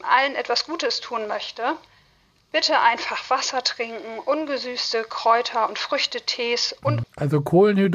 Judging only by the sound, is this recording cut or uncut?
cut